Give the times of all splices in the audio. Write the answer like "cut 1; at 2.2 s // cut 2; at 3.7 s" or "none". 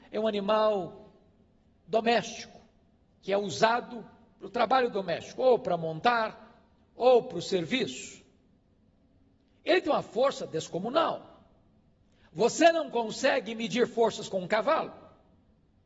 none